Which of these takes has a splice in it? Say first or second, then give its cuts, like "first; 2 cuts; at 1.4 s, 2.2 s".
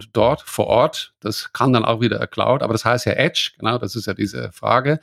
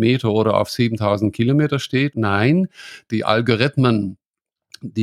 second; 1 cut; at 2.1 s